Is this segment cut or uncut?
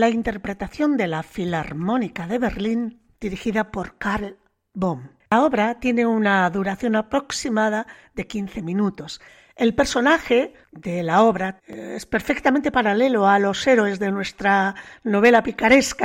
cut